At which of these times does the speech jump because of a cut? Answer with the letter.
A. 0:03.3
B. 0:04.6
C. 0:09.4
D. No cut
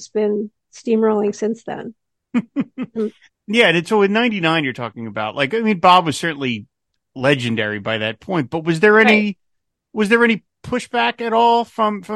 A